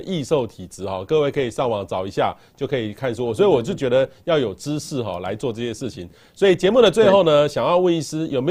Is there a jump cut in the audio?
no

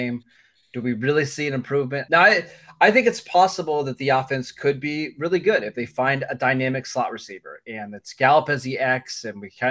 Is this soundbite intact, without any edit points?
no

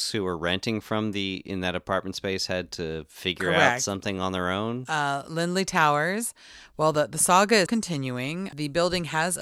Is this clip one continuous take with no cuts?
no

